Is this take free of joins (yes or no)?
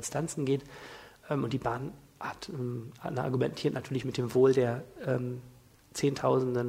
yes